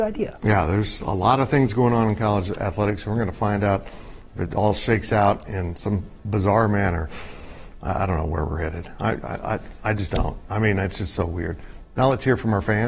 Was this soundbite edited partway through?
no; 0 cuts

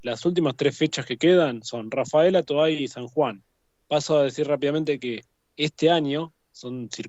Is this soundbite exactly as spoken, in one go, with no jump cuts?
yes; 0 cuts

